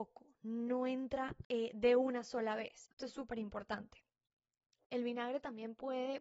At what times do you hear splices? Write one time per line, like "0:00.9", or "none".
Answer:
0:02.9